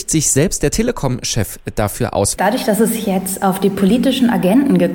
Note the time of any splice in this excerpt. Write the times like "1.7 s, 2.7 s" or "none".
2.4 s